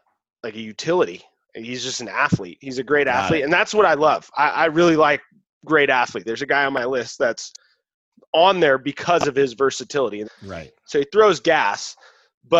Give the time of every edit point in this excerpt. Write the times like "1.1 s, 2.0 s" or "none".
6.3 s, 10.2 s